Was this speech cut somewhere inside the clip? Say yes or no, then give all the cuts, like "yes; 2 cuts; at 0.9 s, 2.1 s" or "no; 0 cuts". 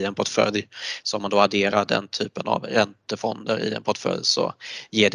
yes; 1 cut; at 1.0 s